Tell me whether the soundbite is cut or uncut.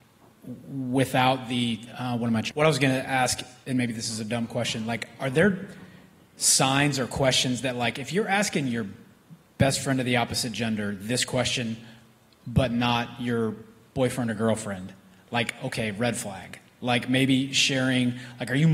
cut